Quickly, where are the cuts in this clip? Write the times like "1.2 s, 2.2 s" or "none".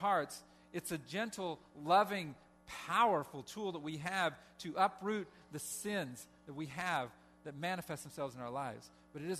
none